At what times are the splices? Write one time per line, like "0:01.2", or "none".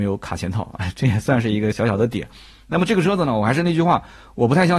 none